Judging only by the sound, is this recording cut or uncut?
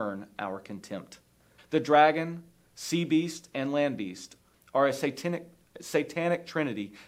cut